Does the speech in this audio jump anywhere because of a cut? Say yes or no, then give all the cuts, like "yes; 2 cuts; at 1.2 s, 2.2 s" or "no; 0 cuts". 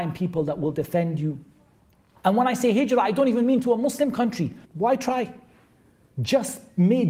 yes; 2 cuts; at 2.2 s, 4.6 s